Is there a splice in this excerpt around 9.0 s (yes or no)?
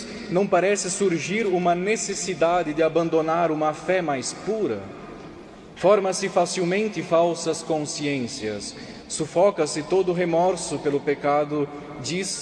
no